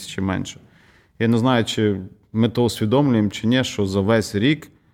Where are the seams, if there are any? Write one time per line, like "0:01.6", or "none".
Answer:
none

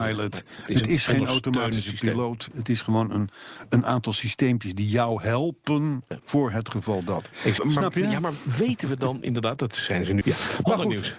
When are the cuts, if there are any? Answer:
0:07.6
0:10.2

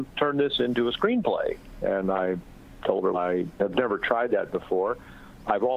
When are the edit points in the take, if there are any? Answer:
0:03.1

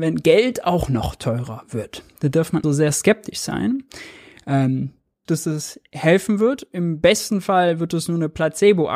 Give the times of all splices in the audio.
0:02.6
0:05.3

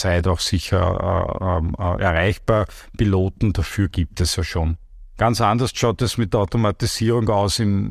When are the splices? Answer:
none

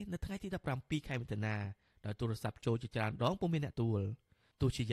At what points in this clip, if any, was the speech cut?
0:03.7

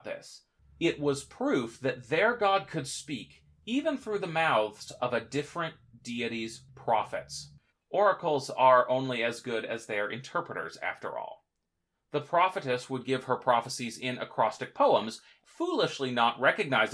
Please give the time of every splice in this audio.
0:07.7
0:11.9
0:15.4

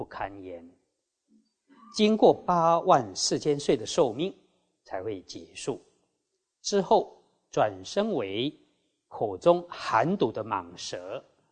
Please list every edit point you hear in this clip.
none

